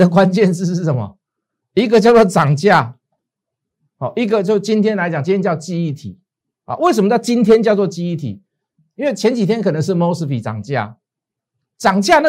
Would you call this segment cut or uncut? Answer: uncut